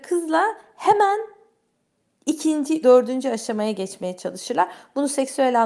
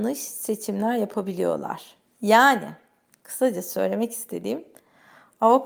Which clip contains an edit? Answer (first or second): first